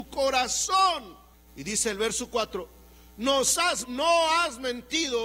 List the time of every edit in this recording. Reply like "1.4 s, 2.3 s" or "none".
3.8 s